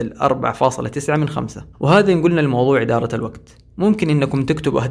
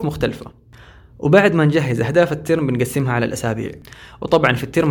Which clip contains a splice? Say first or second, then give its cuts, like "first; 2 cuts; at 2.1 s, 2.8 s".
first; 1 cut; at 1.7 s